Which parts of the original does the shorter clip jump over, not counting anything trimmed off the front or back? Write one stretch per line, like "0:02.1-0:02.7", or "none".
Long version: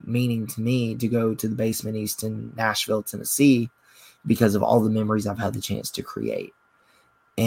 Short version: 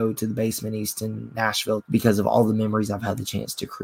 0:03.0-0:04.2